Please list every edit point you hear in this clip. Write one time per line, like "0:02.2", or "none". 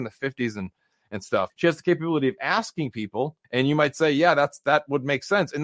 0:01.5
0:03.4